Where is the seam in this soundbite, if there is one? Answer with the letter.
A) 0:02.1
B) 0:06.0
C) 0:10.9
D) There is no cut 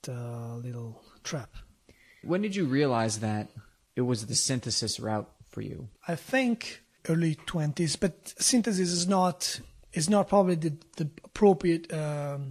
D